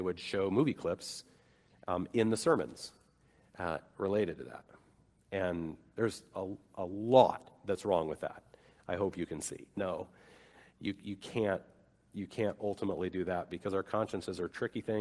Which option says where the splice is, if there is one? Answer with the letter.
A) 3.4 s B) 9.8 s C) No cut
B